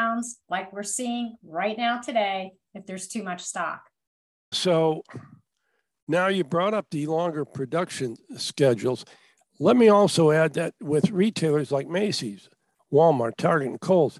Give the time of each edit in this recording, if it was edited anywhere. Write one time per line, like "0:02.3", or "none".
0:04.5